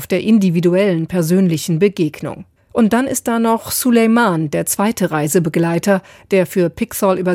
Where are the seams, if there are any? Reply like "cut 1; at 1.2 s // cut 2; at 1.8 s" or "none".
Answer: cut 1; at 2.6 s // cut 2; at 6.1 s